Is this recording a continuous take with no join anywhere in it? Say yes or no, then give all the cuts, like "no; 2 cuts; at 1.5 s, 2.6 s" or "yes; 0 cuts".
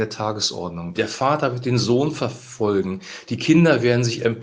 no; 1 cut; at 0.9 s